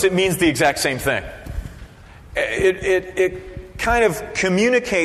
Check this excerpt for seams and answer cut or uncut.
uncut